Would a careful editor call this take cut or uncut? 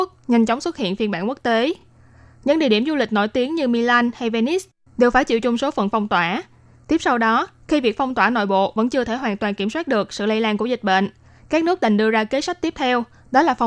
uncut